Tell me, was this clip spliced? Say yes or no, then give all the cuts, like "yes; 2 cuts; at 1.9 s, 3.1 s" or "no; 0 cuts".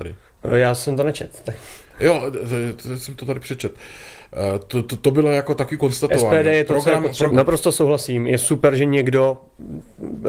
yes; 1 cut; at 7.3 s